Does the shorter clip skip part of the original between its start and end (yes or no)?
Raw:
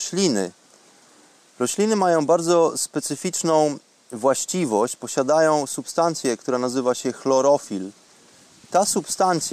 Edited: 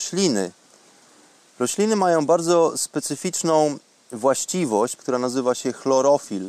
yes